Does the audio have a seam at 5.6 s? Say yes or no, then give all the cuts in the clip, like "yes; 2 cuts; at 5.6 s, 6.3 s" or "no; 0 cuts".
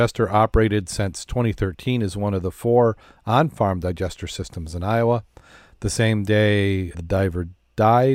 no; 1 cut; at 6.9 s